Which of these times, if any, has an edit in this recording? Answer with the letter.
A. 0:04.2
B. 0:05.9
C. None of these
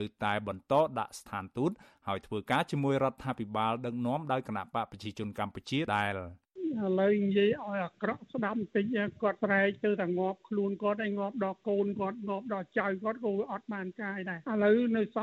B